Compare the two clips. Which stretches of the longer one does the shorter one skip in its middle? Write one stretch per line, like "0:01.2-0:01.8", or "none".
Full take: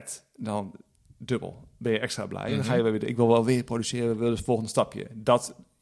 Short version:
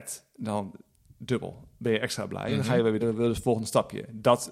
0:03.0-0:04.0